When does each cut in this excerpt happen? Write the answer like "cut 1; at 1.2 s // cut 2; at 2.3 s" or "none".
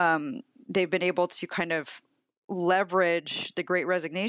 none